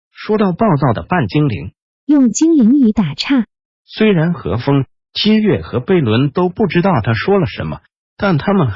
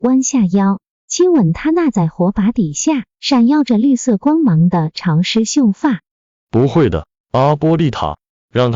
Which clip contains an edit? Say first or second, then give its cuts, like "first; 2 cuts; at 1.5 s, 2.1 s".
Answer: first; 1 cut; at 1.9 s